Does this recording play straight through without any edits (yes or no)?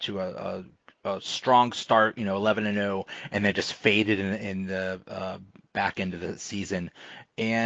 yes